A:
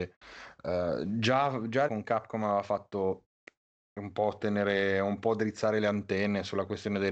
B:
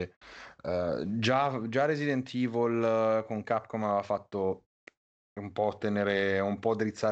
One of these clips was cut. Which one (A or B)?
A